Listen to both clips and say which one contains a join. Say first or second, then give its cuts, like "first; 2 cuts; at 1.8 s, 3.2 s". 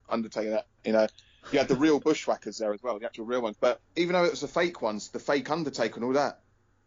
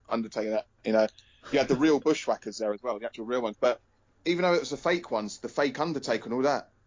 first; 1 cut; at 3.9 s